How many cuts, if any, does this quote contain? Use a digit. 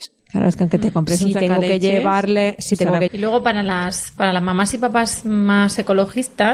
1